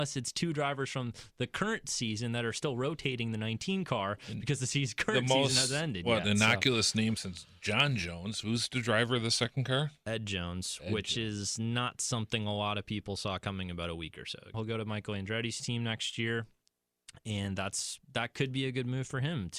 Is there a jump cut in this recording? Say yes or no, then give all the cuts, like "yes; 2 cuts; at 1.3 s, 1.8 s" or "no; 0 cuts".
yes; 1 cut; at 14.5 s